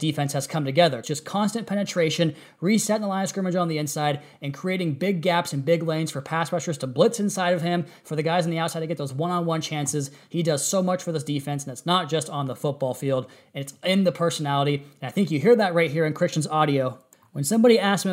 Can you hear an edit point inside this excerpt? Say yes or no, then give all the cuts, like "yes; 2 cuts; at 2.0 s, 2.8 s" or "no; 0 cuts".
yes; 1 cut; at 1.0 s